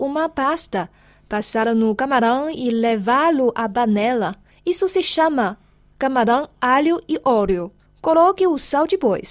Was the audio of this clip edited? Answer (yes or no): no